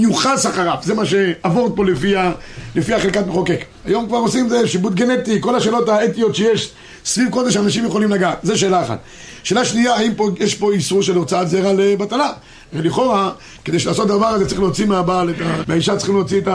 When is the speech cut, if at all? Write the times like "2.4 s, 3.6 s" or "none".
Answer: 3.8 s, 15.6 s